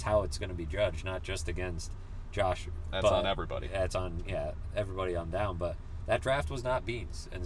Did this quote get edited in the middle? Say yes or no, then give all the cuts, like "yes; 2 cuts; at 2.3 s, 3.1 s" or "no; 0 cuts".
yes; 1 cut; at 2.9 s